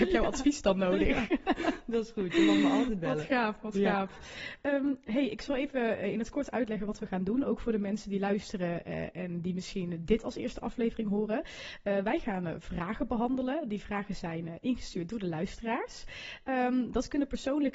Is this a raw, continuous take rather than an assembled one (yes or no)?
yes